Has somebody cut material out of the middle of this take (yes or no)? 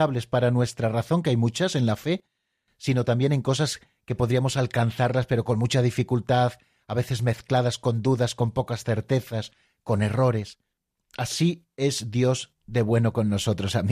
no